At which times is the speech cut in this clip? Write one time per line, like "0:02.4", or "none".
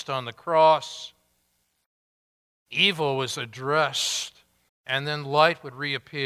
0:04.7